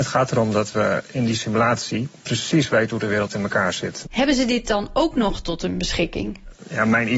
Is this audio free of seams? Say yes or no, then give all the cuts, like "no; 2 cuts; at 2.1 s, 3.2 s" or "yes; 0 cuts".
no; 1 cut; at 4.0 s